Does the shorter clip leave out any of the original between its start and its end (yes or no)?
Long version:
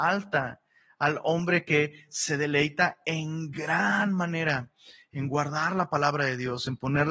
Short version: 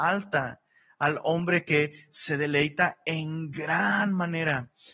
no